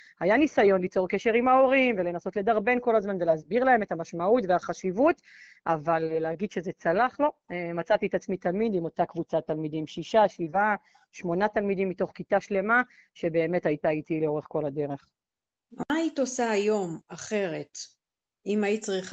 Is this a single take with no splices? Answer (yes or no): yes